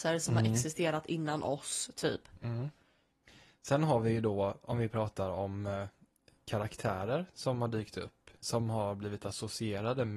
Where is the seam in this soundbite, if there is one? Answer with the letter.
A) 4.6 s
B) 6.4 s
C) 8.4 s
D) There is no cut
C